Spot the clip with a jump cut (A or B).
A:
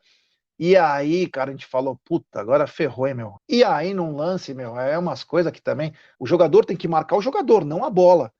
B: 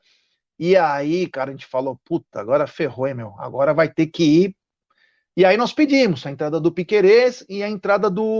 A